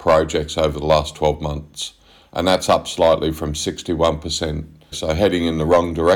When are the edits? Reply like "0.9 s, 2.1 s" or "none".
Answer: 4.9 s